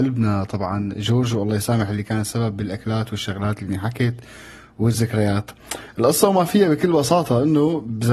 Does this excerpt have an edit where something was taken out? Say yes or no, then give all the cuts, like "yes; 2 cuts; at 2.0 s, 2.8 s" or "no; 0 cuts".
no; 0 cuts